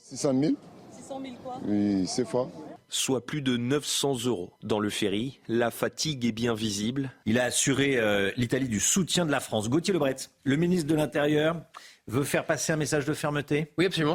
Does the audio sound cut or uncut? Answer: cut